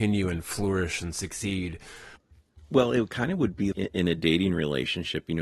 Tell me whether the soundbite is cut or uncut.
cut